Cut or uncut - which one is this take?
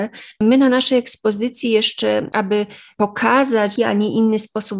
cut